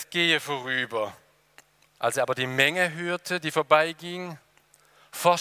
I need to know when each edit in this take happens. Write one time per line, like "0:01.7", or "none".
0:01.9